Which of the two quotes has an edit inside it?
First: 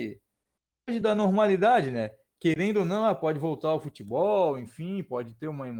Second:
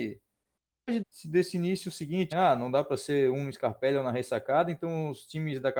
second; 2 cuts; at 1.0 s, 2.3 s

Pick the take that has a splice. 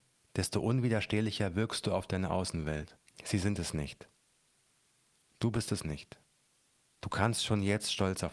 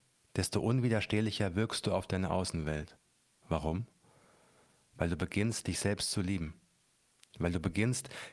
first; 2 cuts; at 3.1 s, 6.9 s

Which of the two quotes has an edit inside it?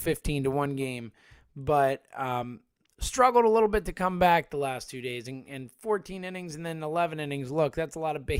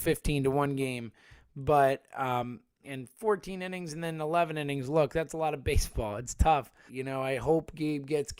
second; 2 cuts; at 2.8 s, 6.9 s

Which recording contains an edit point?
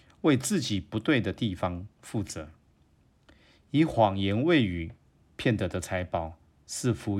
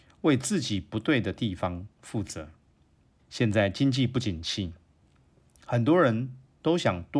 second; 1 cut; at 3.2 s

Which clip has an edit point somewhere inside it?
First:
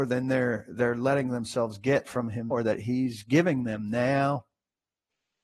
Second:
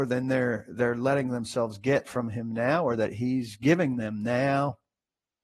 first; 1 cut; at 2.5 s

